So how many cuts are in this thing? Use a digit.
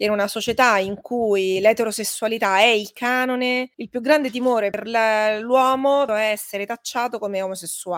2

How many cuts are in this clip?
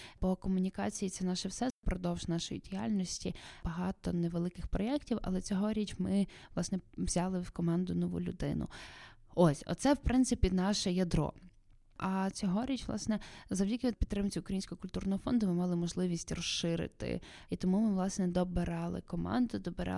0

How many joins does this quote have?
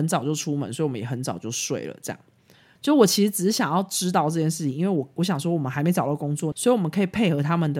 2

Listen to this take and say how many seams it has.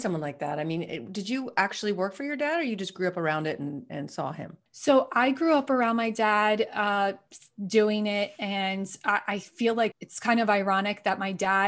2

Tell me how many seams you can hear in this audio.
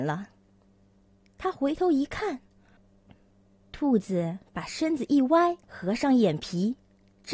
2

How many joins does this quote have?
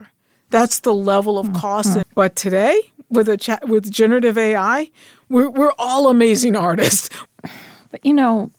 2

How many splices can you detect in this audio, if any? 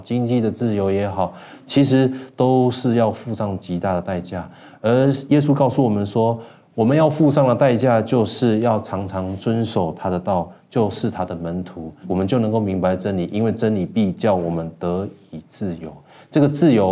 0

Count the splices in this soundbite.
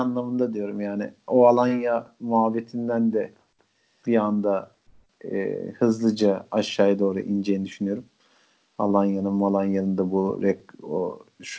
1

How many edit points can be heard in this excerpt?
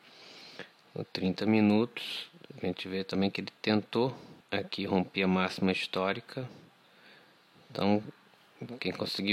1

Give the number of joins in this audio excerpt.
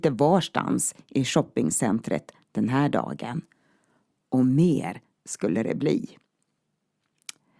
0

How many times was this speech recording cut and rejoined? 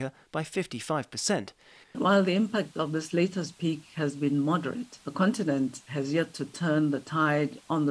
1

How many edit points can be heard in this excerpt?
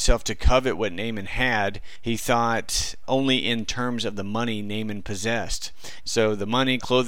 2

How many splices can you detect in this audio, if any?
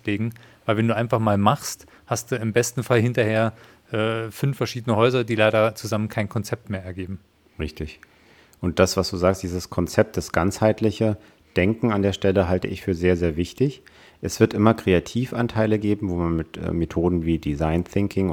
0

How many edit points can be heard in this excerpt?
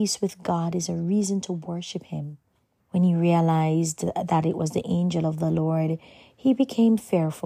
1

